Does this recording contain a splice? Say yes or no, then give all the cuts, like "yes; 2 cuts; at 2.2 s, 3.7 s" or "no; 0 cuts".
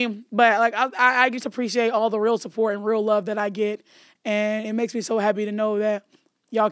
no; 0 cuts